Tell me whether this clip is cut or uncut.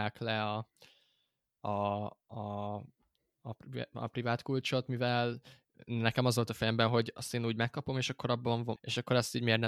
cut